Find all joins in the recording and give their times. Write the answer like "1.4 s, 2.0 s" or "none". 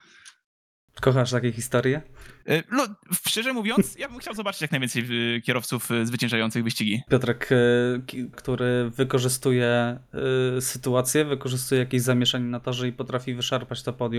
7.1 s, 8.3 s